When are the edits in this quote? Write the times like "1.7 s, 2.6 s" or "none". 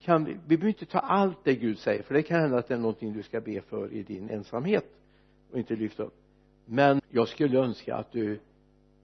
7.0 s